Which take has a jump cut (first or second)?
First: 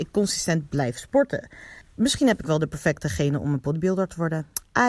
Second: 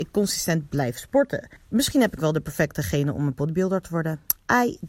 second